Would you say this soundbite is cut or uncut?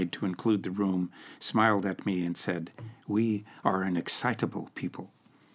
uncut